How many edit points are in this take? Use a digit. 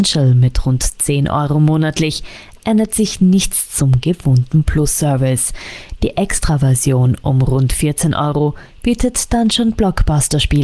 0